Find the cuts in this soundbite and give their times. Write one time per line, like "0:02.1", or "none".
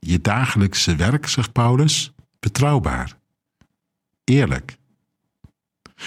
0:02.3